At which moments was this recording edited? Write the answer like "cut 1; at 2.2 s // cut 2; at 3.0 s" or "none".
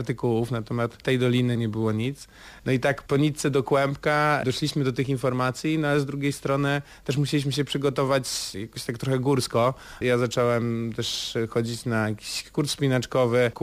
cut 1; at 2.6 s // cut 2; at 10.0 s